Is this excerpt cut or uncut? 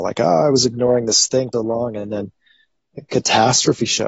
cut